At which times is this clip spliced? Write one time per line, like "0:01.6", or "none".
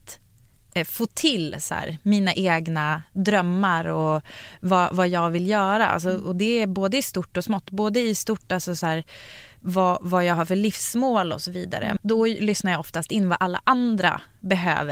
0:12.0